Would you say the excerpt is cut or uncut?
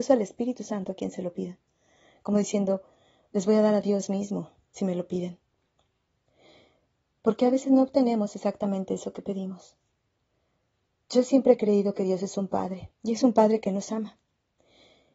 cut